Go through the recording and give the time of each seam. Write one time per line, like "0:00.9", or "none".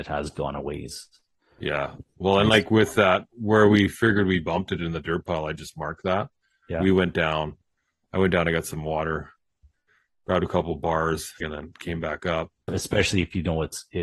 0:11.4
0:12.7

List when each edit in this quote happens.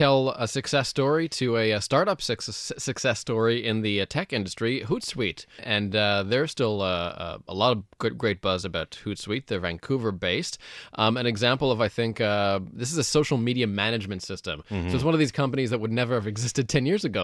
0:05.6

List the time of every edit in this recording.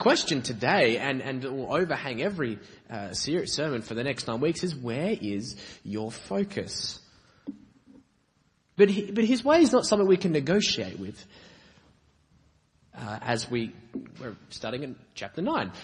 0:08.6
0:12.9

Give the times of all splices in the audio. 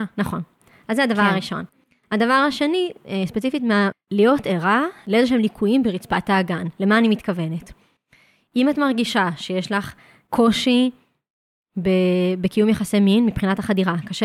0:03.9

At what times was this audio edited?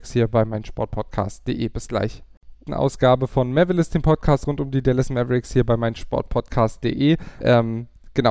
0:02.7
0:07.4

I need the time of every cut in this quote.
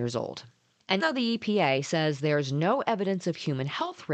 0:01.0

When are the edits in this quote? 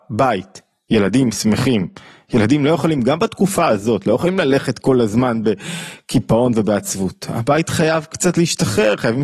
none

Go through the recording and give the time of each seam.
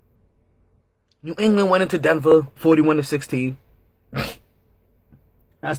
0:02.6

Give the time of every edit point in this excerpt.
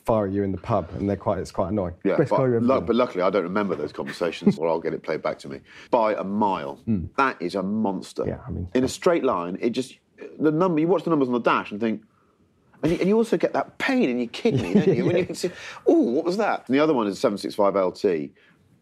0:04.6
0:05.9

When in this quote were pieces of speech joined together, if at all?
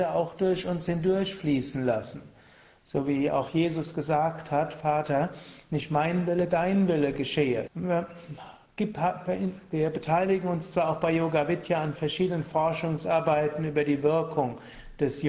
0:07.7

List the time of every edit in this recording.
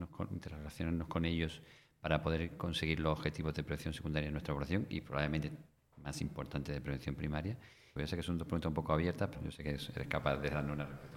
0:08.0
0:09.3

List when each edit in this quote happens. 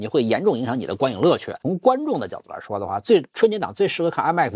0:01.6

